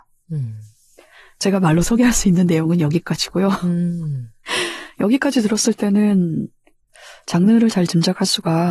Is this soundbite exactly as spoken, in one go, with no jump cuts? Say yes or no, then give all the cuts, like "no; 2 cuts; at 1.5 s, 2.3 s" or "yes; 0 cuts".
yes; 0 cuts